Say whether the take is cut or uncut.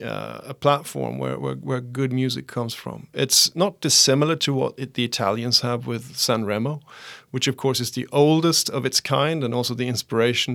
uncut